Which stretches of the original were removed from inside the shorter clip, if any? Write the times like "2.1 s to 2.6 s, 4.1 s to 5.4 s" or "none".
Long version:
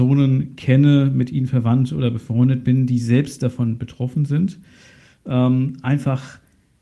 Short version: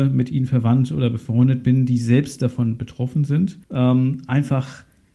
4.6 s to 5.2 s